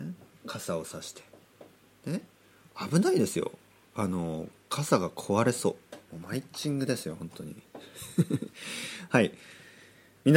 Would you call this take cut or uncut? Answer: cut